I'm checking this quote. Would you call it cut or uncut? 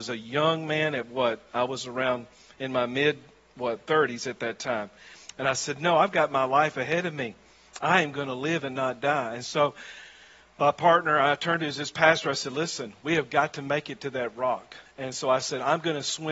cut